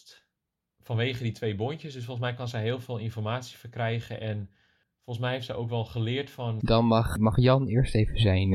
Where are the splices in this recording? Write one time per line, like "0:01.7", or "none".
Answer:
0:06.6